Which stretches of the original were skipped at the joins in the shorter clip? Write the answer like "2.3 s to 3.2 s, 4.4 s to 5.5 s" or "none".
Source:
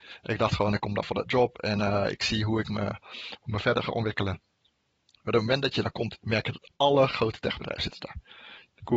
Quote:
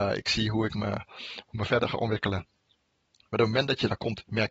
none